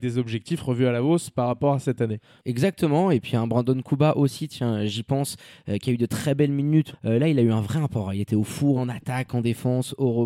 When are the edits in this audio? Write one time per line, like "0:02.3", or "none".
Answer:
0:06.9
0:08.8